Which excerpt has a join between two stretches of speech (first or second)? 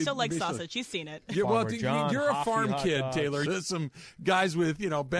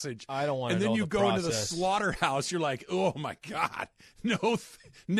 first